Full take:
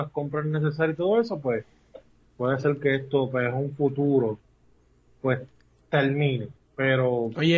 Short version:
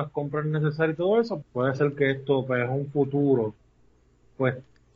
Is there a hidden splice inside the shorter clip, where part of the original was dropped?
yes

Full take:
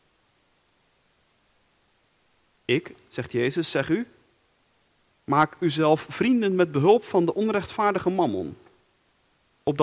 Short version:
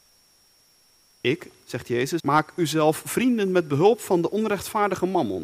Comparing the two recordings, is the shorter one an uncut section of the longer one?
no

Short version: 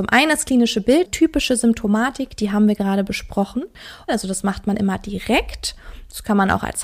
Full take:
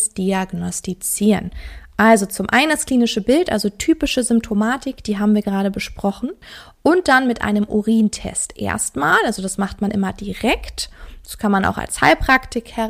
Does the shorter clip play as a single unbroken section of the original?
no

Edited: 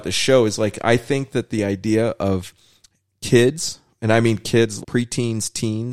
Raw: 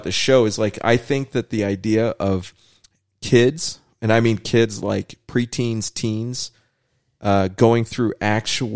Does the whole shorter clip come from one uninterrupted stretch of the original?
no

